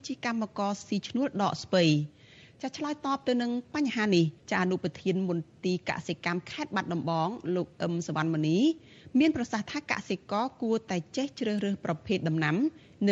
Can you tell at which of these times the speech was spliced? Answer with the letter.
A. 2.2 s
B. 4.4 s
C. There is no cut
B